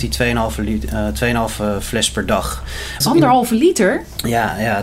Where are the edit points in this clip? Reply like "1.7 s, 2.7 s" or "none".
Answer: 3.0 s